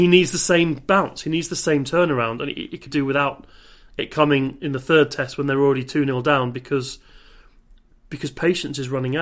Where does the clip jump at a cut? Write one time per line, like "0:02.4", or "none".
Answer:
0:02.9